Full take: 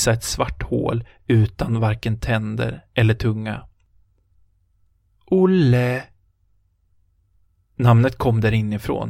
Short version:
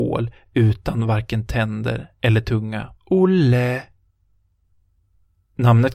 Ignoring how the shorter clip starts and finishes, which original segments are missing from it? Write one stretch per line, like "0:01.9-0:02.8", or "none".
0:03.7-0:05.2